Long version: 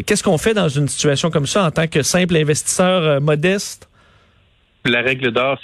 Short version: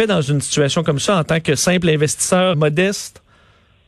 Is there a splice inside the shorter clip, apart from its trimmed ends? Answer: yes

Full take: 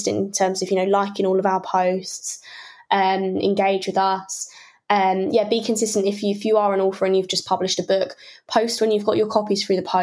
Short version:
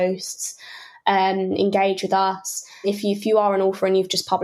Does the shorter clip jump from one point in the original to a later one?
yes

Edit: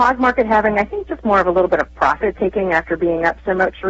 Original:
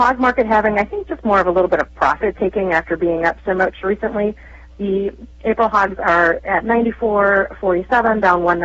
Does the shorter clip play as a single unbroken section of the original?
yes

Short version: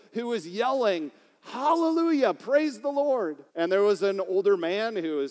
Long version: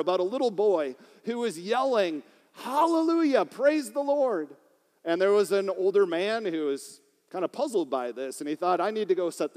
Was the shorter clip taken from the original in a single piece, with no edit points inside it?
no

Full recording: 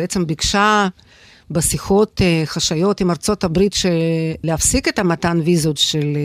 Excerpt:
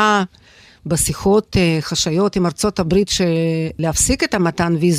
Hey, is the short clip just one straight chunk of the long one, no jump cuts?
yes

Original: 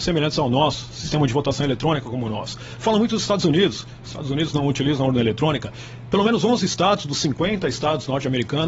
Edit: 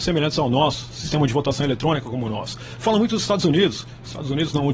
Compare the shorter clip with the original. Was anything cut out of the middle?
no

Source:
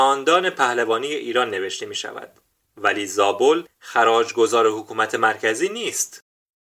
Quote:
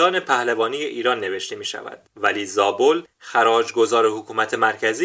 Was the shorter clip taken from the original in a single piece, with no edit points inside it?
no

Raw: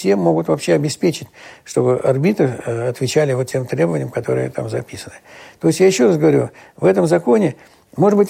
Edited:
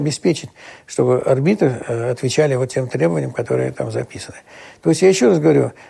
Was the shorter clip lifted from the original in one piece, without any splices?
yes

